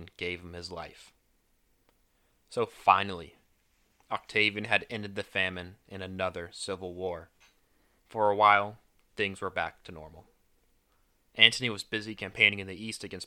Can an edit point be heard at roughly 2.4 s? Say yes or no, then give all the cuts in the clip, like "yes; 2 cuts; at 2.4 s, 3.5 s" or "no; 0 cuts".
no; 2 cuts; at 4.0 s, 8.0 s